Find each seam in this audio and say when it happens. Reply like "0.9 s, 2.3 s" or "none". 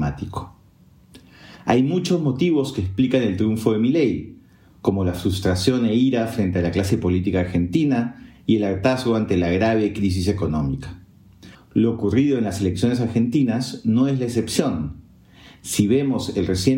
11.5 s